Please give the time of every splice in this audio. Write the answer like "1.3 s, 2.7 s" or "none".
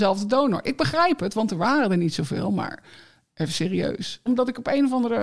4.3 s